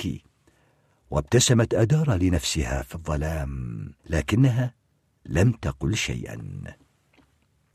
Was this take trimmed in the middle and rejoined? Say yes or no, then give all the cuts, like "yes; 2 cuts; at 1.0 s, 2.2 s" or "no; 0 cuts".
yes; 1 cut; at 4.0 s